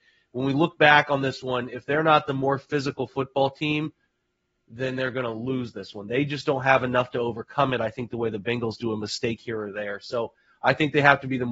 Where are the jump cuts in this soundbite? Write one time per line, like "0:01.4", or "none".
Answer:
none